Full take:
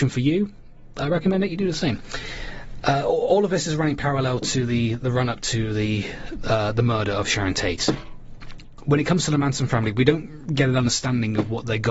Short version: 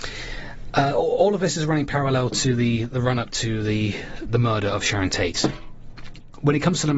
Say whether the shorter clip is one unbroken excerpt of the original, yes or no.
no